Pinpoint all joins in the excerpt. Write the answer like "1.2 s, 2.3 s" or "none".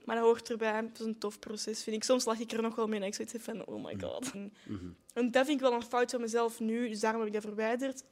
4.3 s